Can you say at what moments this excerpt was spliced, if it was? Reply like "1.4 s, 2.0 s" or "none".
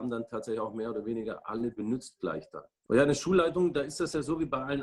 2.9 s